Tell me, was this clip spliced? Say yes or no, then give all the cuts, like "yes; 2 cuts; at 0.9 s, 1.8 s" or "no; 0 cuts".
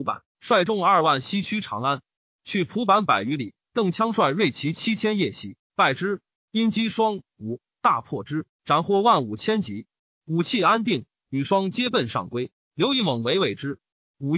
yes; 2 cuts; at 6.4 s, 12.6 s